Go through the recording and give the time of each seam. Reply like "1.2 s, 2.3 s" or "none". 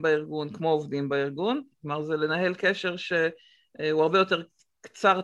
1.7 s